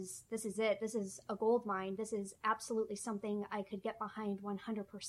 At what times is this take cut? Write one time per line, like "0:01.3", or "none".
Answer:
none